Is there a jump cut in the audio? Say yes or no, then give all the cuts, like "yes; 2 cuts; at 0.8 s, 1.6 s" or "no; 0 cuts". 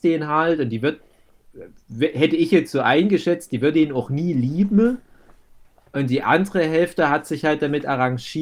no; 0 cuts